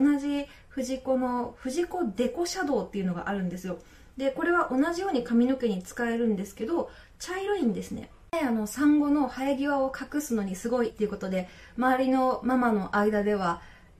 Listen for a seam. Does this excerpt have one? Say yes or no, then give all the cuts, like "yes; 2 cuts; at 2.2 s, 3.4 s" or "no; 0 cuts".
yes; 1 cut; at 10.9 s